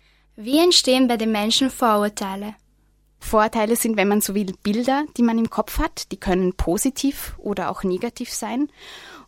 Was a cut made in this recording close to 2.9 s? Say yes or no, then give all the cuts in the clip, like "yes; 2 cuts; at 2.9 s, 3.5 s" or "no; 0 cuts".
no; 0 cuts